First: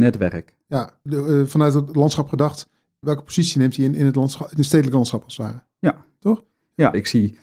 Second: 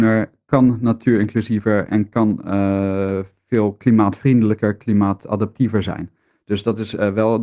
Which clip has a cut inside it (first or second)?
first